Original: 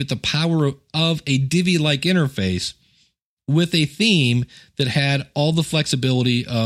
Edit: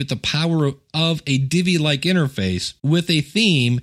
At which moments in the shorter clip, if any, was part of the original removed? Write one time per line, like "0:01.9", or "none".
0:02.8